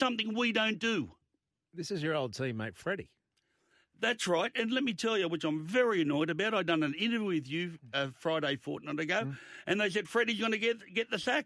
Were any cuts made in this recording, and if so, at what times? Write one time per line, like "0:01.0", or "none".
none